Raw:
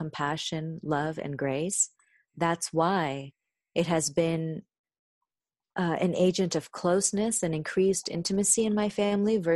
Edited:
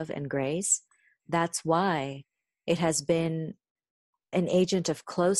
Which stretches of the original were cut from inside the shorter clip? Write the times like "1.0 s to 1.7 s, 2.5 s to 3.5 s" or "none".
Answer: 5.4 s to 6.0 s